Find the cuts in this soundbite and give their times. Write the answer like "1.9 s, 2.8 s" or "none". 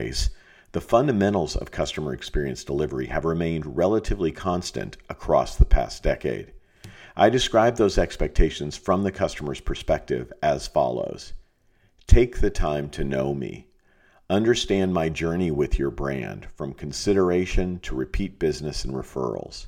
none